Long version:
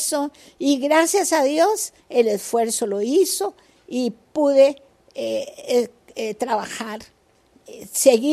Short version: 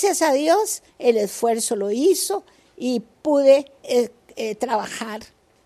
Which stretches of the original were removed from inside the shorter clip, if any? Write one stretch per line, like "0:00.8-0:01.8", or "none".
0:04.9-0:05.6

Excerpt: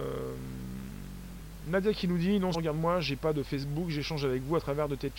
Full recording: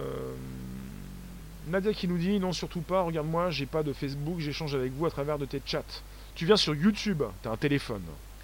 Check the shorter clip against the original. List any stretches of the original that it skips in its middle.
0:02.5-0:03.0

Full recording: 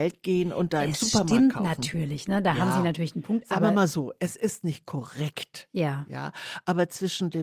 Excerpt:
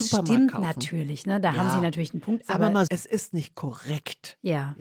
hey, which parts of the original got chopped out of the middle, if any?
0:03.9-0:04.2

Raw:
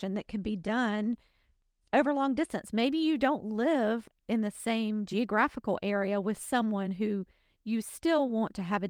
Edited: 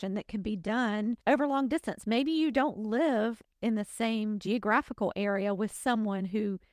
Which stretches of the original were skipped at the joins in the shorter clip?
0:01.2-0:01.9

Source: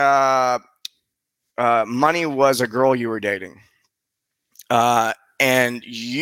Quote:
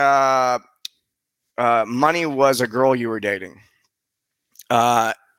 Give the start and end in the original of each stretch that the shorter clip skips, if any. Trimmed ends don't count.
none

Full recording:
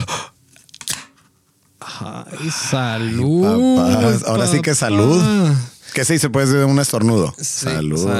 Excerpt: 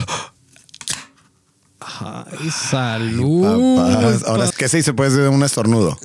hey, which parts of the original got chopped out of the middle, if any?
0:04.5-0:05.9

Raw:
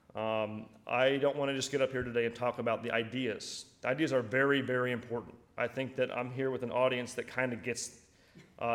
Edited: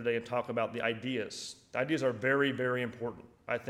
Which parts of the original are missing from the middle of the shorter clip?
none

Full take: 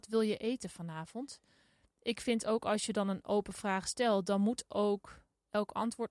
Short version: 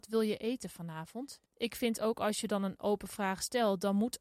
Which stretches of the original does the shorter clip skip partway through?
0:01.5-0:01.9

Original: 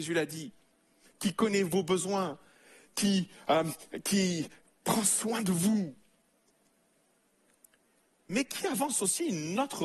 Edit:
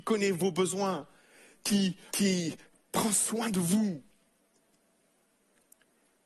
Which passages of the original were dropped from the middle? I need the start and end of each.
0:03.4-0:04.0

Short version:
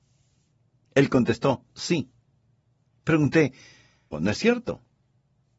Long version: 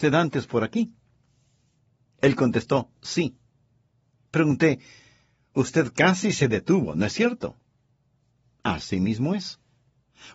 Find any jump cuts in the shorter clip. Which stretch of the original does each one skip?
0:05.4-0:06.9

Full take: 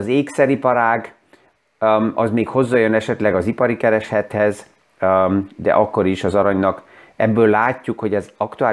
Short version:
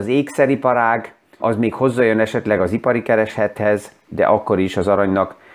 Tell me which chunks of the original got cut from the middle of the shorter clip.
0:01.4-0:02.1
0:04.8-0:05.5

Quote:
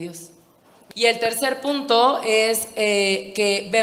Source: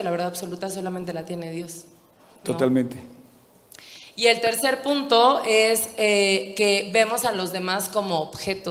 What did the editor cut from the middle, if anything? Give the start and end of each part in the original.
0:02.5-0:04.1

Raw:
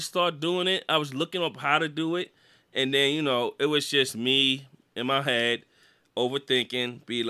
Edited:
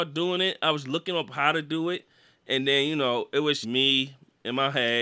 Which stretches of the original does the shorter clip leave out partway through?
0:03.9-0:04.1

